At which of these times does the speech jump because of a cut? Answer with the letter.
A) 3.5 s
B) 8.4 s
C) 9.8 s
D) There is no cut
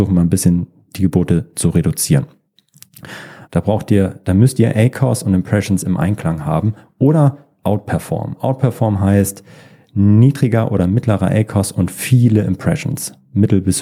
A